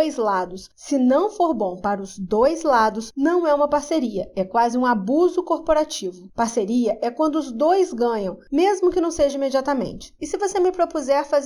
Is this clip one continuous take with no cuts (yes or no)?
no